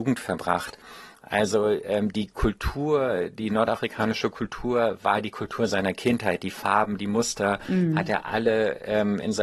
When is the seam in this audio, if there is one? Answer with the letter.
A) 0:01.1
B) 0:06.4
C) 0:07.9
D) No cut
D